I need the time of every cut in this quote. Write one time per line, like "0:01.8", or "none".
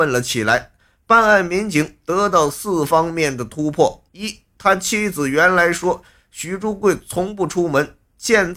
0:04.1